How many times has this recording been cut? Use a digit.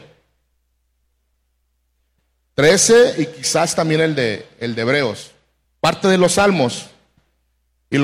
1